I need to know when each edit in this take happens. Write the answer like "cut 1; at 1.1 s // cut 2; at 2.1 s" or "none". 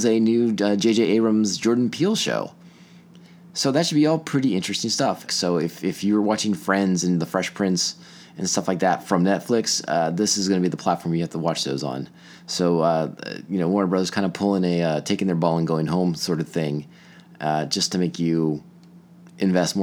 cut 1; at 5.3 s